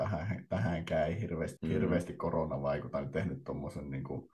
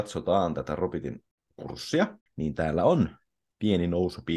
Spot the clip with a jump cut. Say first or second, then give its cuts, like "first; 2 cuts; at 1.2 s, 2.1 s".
first; 1 cut; at 1.6 s